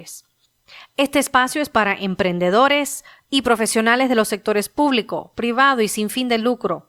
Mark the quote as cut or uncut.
uncut